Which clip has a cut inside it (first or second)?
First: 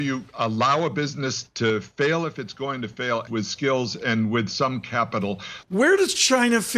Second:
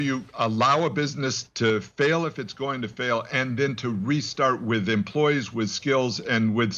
first